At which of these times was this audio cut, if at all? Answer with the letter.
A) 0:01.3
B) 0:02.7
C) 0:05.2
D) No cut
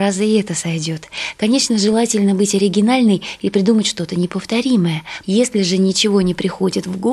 C